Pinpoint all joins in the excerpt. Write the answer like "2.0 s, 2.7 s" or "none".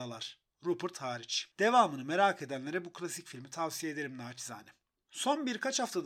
1.5 s